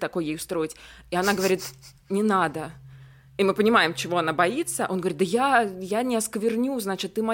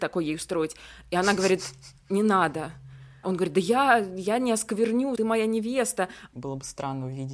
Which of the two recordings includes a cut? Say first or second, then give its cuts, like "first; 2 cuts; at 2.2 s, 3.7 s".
second; 3 cuts; at 3.2 s, 5.2 s, 6.3 s